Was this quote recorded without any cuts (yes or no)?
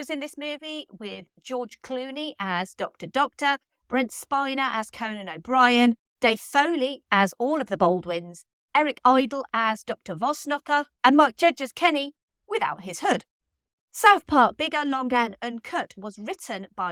no